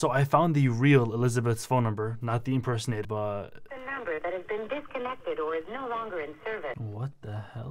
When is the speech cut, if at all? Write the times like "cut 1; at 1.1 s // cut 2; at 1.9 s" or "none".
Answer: cut 1; at 3.0 s